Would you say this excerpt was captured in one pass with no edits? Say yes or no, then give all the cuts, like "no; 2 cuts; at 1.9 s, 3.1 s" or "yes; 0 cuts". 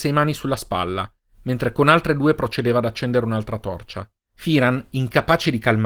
no; 1 cut; at 4.2 s